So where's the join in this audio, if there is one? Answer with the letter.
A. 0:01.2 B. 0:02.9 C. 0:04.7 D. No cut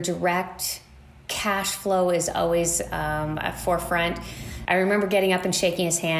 C